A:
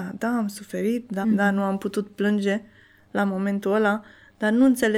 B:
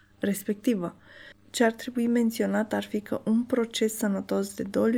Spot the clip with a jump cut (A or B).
A